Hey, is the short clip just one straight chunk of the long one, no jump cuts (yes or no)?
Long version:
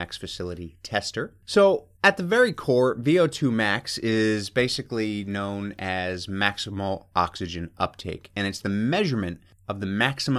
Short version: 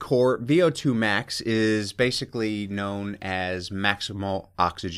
yes